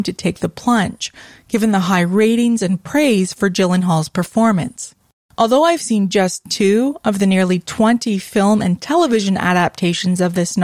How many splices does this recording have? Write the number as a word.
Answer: zero